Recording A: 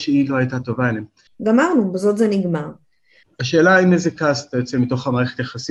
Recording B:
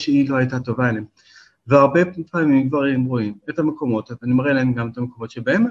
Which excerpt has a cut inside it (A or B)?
A